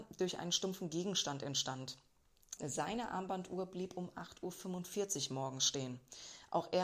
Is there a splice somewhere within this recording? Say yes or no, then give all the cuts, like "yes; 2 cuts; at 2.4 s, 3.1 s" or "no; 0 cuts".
yes; 1 cut; at 2.6 s